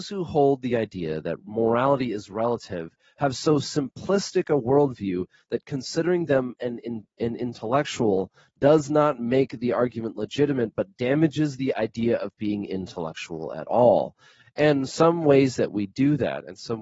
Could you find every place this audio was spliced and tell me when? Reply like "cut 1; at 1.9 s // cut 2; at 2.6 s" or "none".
cut 1; at 14.4 s